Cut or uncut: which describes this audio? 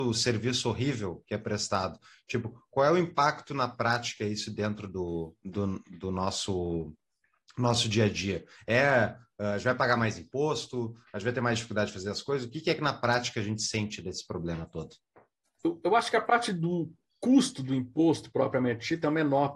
uncut